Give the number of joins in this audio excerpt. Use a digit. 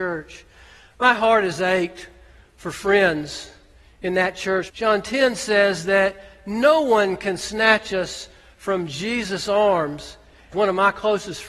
2